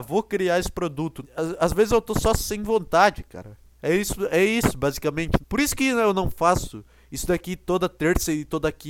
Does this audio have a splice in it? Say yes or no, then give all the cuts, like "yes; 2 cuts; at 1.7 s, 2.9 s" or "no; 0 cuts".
yes; 2 cuts; at 1.2 s, 5.4 s